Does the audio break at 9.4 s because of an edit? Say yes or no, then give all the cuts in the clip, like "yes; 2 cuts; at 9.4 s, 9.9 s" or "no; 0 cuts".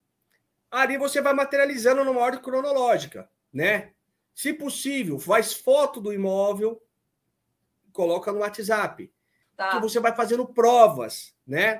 yes; 1 cut; at 9.4 s